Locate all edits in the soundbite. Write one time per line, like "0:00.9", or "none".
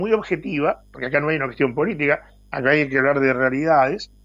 none